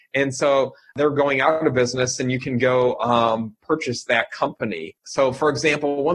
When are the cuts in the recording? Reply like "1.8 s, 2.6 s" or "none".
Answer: 5.0 s